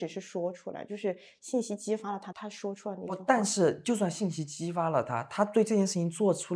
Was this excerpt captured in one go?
no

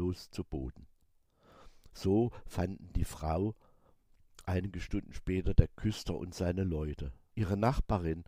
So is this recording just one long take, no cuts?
no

